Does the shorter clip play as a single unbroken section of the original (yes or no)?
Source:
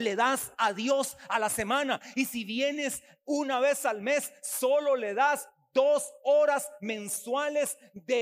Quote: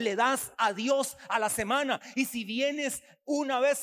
yes